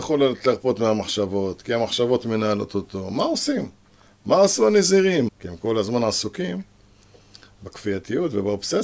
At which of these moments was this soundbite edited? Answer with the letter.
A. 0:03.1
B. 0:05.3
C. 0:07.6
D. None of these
B